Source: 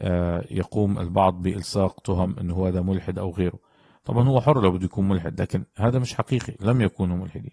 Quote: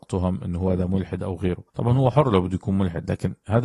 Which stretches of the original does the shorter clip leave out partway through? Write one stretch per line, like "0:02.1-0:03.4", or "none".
0:03.6-0:04.0